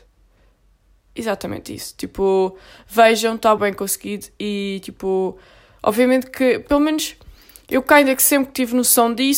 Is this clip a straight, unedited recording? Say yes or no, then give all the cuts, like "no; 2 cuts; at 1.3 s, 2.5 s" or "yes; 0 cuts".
no; 1 cut; at 3.6 s